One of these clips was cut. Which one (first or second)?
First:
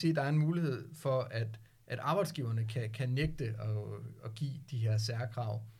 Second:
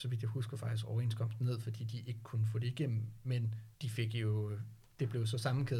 second